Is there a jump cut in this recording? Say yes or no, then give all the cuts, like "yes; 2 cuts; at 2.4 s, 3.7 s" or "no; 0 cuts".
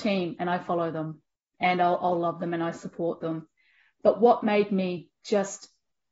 no; 0 cuts